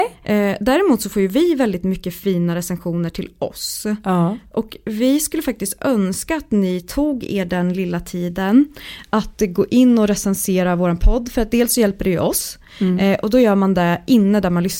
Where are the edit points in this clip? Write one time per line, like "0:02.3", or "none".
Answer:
none